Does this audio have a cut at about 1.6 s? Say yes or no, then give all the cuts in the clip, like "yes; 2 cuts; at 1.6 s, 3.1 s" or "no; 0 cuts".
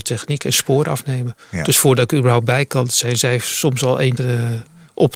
no; 1 cut; at 4.2 s